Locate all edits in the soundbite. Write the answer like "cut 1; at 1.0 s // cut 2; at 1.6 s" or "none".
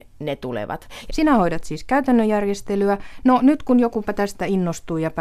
cut 1; at 1.1 s